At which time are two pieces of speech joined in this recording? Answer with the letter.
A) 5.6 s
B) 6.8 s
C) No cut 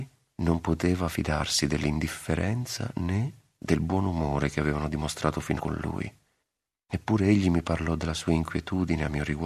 A